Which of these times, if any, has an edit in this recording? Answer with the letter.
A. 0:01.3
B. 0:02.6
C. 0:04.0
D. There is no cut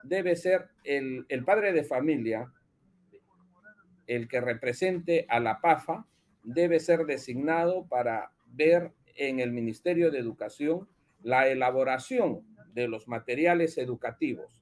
D